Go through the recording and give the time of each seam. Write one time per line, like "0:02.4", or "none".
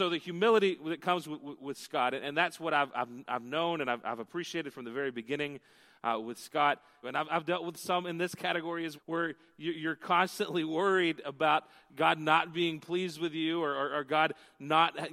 0:07.0
0:08.9